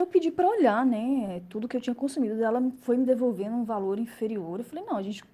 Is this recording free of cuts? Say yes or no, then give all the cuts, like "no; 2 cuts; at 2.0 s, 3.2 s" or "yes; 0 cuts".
yes; 0 cuts